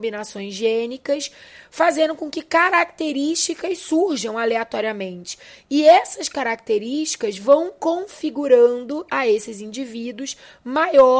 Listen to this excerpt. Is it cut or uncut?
uncut